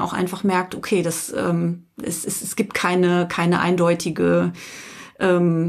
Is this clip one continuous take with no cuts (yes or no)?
yes